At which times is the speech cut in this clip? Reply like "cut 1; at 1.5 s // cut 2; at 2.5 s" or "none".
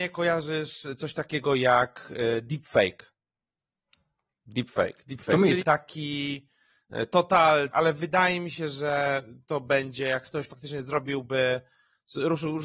cut 1; at 4.3 s // cut 2; at 5.6 s // cut 3; at 7.7 s